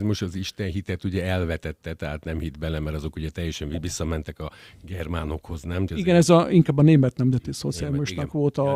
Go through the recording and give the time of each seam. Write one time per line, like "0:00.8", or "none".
0:05.9